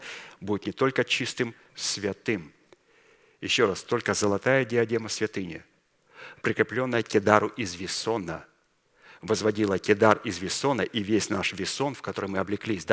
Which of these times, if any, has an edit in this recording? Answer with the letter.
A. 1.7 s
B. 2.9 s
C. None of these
A